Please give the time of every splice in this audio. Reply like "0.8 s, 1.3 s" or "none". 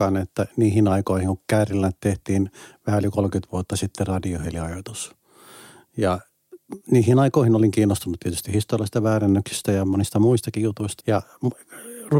11.0 s

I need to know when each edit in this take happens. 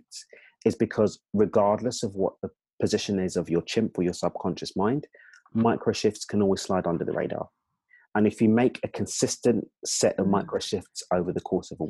none

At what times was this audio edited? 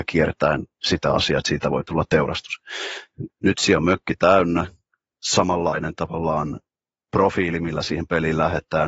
3.3 s, 5.1 s

